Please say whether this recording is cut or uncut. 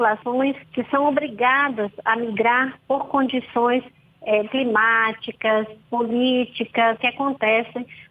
cut